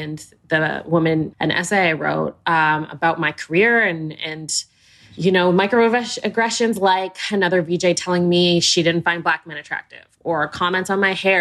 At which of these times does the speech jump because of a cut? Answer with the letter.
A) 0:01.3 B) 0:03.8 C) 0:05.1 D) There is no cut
A